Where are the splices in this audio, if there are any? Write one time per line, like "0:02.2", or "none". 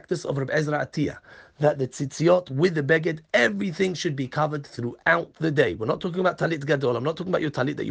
none